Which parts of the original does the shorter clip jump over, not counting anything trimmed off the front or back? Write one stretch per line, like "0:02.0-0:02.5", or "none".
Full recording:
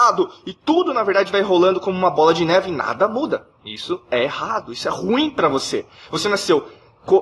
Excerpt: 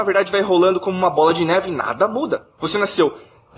0:03.6-0:06.1